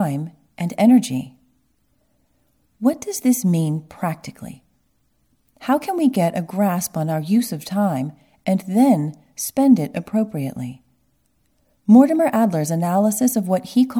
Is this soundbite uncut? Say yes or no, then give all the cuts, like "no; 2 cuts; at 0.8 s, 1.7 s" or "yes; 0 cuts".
yes; 0 cuts